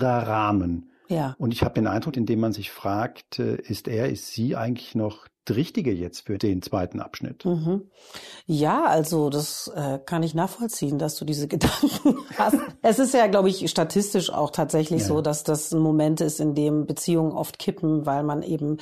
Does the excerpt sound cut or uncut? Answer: cut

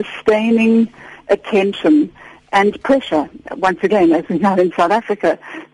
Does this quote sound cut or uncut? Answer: uncut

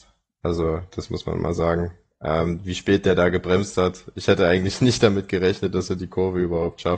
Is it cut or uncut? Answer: uncut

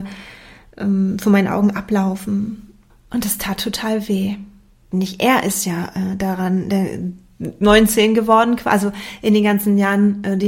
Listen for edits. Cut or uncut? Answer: cut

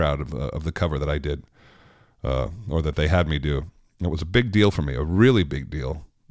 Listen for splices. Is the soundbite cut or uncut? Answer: uncut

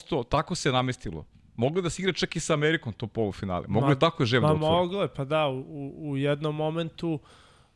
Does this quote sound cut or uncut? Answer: uncut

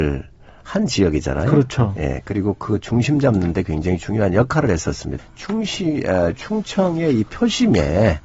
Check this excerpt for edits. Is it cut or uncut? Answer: cut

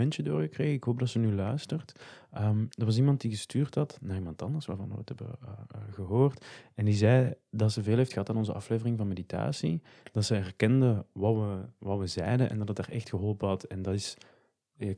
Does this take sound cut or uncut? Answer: uncut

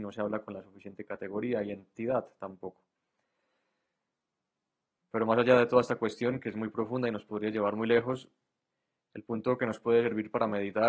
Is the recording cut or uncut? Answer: uncut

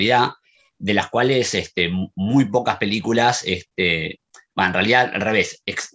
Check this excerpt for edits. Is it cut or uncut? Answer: uncut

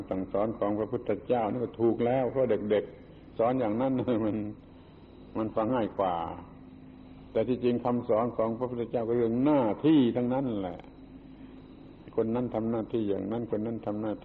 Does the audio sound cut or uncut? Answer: cut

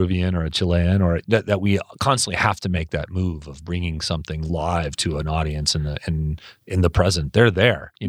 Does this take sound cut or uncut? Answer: cut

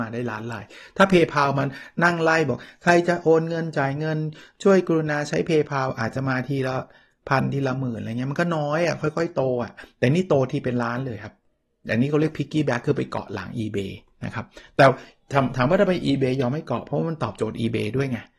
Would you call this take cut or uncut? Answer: uncut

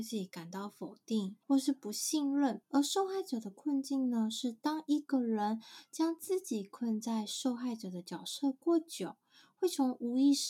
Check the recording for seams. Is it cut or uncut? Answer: cut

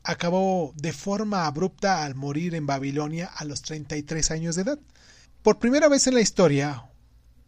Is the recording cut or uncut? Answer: cut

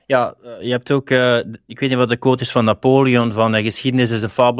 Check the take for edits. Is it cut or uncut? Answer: uncut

